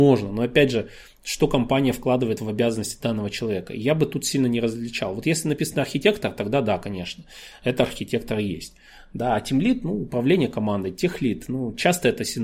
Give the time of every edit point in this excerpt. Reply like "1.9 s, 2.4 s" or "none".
none